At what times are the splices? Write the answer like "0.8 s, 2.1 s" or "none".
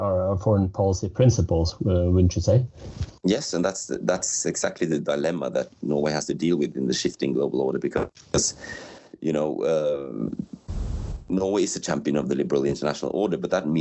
none